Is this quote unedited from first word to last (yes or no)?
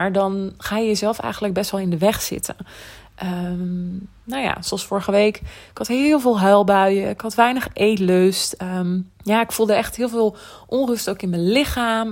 no